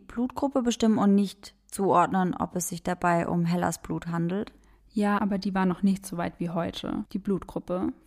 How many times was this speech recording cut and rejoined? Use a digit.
2